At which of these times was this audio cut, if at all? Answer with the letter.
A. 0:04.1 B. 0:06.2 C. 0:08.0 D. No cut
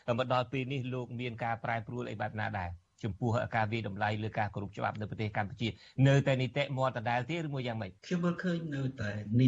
C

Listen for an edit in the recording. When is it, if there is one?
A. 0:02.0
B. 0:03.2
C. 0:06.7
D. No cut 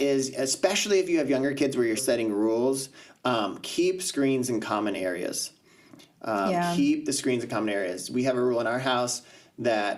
A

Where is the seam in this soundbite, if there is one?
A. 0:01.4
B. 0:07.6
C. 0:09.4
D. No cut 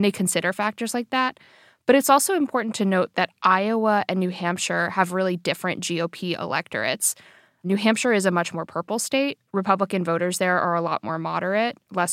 D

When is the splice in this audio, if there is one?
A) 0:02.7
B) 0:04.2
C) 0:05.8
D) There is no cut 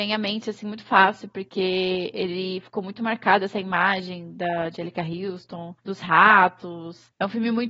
C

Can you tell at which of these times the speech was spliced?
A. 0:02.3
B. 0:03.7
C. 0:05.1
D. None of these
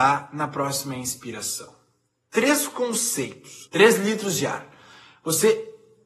B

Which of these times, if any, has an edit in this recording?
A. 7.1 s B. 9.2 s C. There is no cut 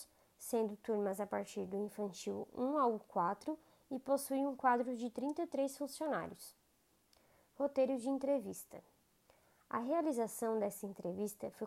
C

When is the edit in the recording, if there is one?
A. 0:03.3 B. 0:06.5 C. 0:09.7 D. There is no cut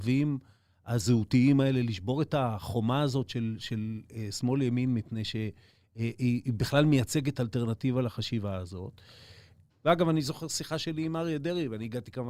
C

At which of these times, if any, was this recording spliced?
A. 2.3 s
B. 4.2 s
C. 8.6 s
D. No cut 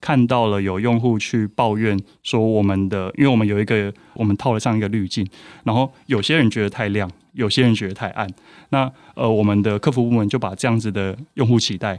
B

